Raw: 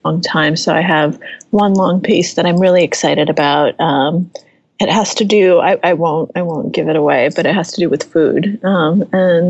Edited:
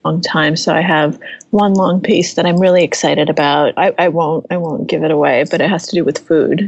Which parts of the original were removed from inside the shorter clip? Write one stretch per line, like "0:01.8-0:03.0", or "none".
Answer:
0:03.8-0:05.6